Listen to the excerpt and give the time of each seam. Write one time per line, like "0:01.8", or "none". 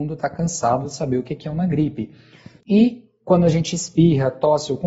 0:02.6